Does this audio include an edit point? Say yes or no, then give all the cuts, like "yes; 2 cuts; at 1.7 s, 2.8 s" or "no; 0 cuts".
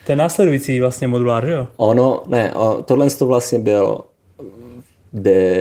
yes; 1 cut; at 2.2 s